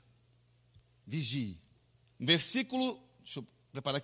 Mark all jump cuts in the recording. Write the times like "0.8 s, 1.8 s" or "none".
2.1 s